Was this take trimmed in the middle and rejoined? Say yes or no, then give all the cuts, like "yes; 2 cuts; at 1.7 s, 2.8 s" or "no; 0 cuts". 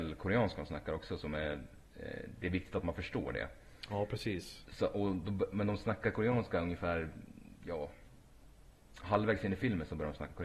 yes; 1 cut; at 1.9 s